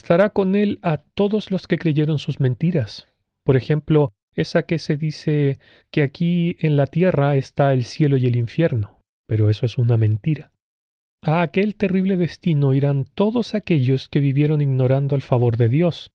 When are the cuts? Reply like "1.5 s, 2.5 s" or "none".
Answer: none